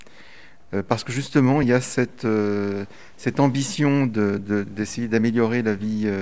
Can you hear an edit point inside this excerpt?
no; 0 cuts

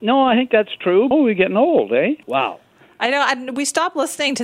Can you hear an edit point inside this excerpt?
yes; 2 cuts; at 1.1 s, 2.2 s

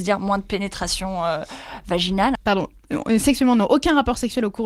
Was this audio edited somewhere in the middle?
yes; 1 cut; at 2.4 s

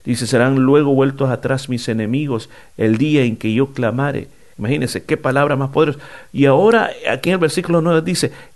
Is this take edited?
yes; 1 cut; at 4.5 s

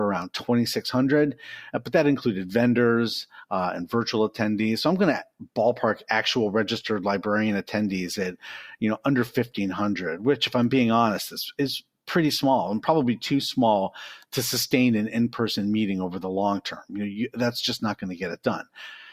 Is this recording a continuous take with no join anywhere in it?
yes; 0 cuts

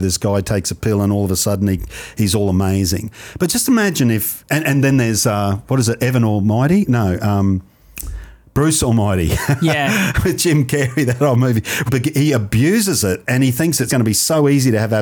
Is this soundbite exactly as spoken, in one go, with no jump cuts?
no; 2 cuts; at 11.9 s, 13.9 s

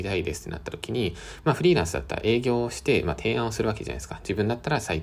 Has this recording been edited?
no; 0 cuts

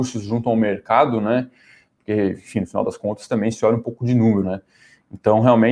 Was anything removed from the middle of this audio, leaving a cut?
yes; 1 cut; at 4.4 s

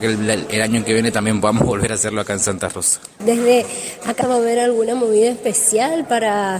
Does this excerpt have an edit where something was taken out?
yes; 2 cuts; at 3.2 s, 4.2 s

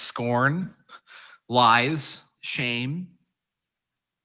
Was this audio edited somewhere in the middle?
yes; 1 cut; at 2.4 s

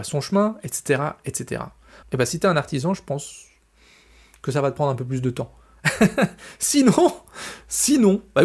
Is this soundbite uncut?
no; 1 cut; at 2.0 s

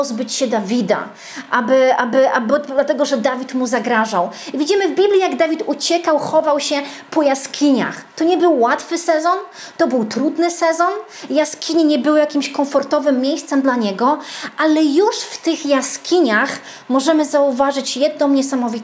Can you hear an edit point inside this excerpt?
no; 0 cuts

